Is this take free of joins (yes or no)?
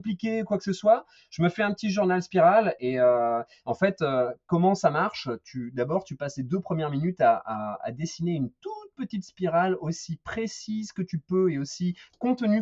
yes